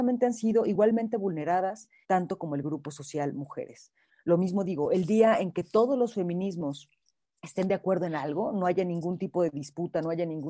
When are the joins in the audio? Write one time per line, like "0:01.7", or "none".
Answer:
0:02.0
0:04.1

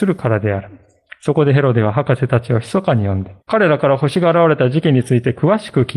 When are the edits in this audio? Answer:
0:03.4

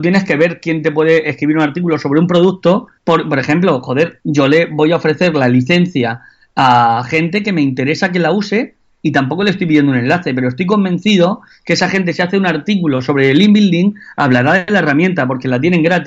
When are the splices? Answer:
0:03.0
0:04.2

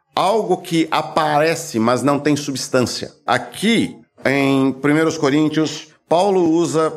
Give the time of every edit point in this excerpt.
0:03.3

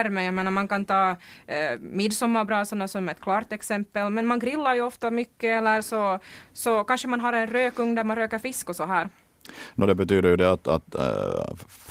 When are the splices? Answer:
none

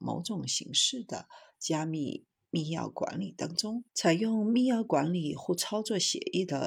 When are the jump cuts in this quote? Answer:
0:03.9

